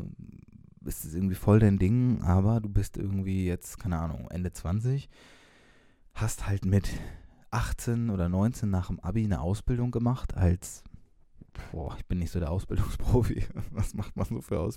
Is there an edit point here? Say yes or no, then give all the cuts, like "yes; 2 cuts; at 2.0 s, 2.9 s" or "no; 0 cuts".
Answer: no; 0 cuts